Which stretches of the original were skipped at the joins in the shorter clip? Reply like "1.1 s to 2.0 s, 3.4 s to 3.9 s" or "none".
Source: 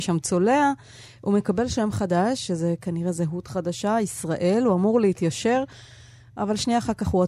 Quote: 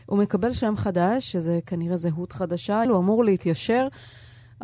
4.0 s to 4.6 s

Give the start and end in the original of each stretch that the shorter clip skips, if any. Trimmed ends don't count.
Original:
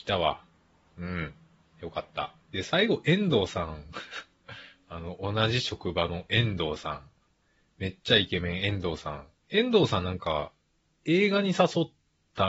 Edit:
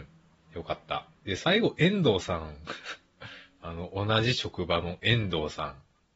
none

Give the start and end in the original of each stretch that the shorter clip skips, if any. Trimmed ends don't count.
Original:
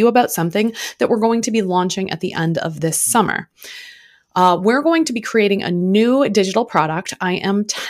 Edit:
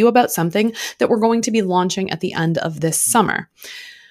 none

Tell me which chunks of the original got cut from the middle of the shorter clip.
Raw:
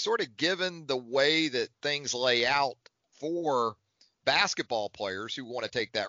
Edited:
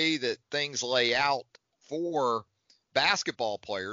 none

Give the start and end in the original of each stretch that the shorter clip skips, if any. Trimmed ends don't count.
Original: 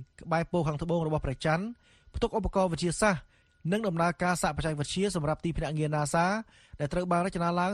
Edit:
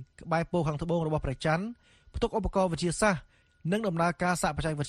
none

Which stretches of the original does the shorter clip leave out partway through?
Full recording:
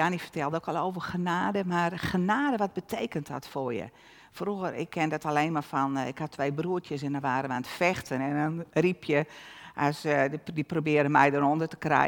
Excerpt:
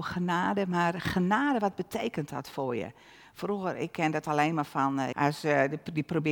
6.1 s to 9.7 s

